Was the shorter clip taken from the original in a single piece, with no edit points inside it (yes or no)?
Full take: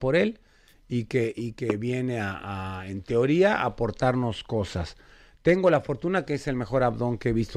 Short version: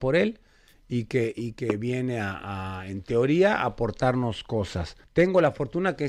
no